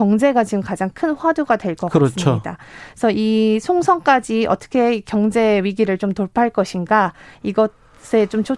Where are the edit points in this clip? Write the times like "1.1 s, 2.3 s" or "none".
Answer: none